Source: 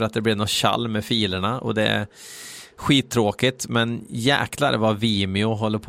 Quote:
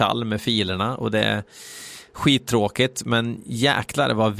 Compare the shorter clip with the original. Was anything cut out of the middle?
no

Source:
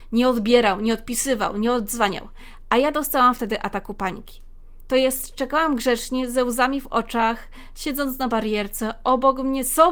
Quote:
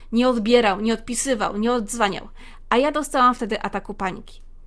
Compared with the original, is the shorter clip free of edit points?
yes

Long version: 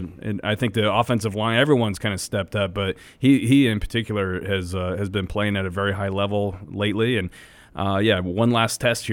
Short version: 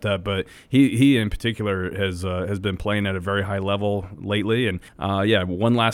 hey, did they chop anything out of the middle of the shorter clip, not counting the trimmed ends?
yes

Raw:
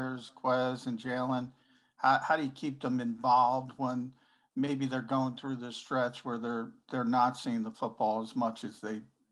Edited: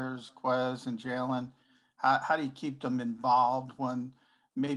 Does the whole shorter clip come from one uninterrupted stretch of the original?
yes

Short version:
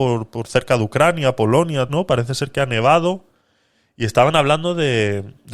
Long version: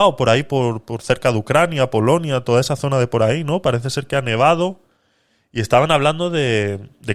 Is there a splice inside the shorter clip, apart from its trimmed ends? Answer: yes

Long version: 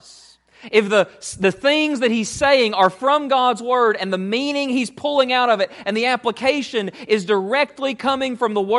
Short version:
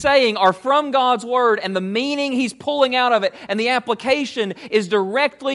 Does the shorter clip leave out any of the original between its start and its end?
no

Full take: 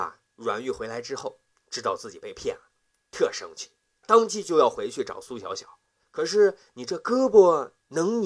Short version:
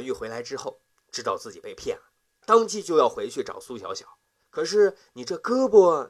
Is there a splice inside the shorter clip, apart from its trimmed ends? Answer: yes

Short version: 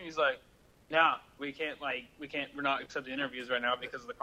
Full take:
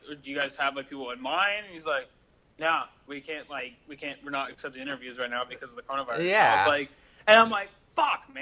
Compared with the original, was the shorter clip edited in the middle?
no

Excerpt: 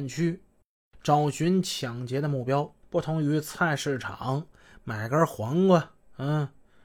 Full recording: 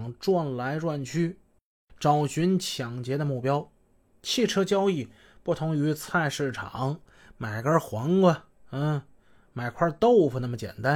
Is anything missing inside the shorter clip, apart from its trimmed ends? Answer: yes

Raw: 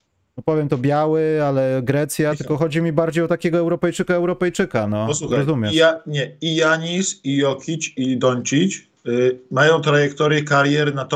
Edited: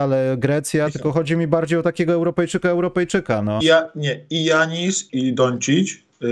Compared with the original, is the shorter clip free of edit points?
no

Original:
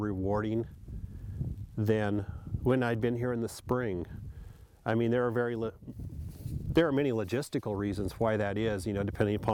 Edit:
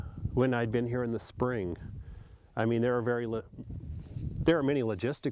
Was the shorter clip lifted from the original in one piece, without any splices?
yes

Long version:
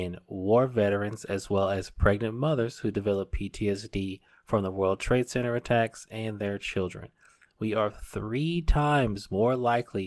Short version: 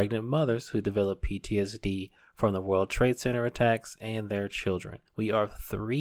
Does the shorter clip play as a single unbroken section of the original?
no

